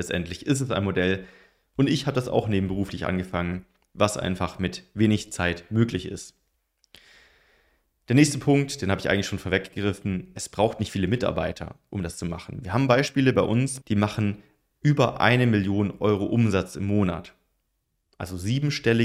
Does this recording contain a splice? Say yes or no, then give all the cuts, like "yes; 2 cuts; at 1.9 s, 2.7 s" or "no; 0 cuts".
yes; 1 cut; at 13.8 s